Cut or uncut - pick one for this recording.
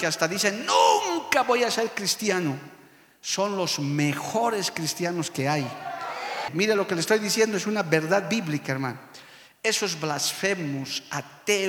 cut